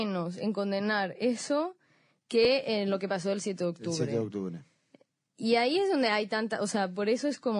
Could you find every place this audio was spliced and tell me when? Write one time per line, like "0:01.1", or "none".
none

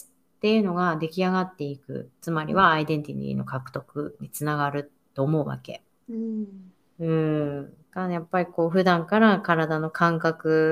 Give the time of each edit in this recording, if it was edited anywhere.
0:06.0
0:07.8

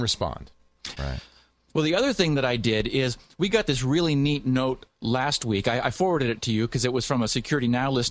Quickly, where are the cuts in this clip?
0:01.0

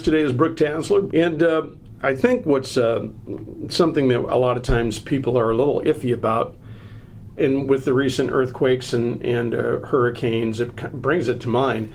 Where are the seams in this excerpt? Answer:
0:01.1
0:07.4

